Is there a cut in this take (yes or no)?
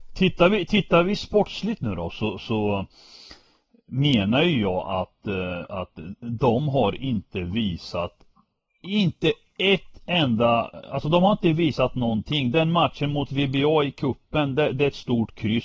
no